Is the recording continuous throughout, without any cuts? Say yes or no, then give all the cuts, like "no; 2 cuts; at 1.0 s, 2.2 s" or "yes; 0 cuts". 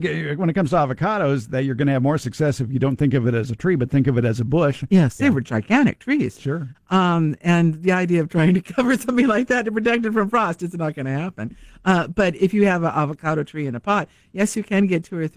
no; 2 cuts; at 5.2 s, 6.7 s